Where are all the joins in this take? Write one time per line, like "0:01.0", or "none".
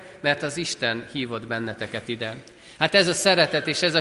none